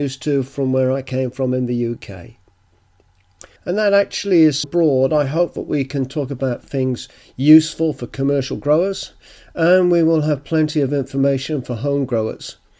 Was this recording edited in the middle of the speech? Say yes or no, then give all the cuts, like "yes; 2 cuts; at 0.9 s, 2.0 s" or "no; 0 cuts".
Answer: yes; 2 cuts; at 3.6 s, 4.6 s